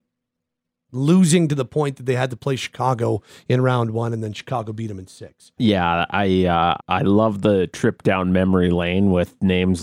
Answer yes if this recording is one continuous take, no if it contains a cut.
no